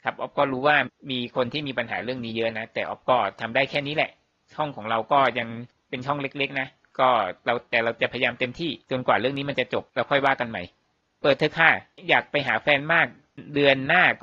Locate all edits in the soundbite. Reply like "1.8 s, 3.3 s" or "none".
8.8 s, 9.9 s